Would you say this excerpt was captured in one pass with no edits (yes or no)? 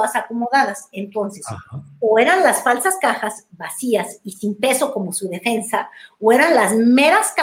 yes